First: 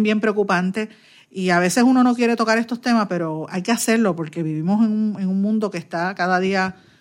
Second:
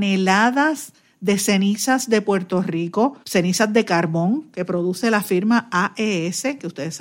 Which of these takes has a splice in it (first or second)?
second